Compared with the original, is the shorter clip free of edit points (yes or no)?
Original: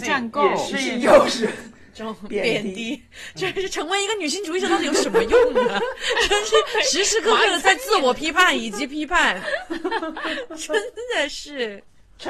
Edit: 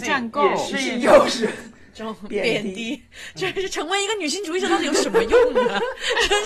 yes